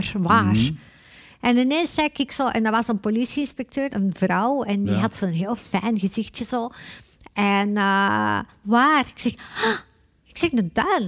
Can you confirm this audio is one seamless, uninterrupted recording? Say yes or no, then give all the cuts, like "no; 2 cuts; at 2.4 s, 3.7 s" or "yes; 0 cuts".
no; 2 cuts; at 3.9 s, 8.6 s